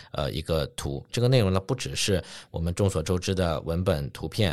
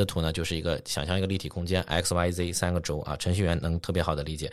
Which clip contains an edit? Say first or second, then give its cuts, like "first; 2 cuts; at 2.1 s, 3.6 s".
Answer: first; 1 cut; at 1.1 s